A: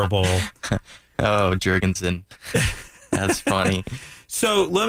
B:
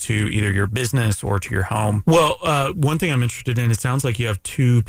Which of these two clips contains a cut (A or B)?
B